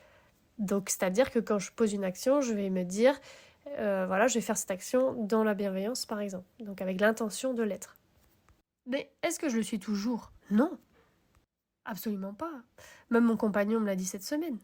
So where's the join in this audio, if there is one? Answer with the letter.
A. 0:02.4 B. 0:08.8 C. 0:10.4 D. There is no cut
C